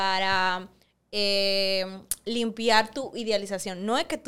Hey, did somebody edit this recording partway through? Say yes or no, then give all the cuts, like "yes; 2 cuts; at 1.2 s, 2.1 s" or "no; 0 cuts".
no; 0 cuts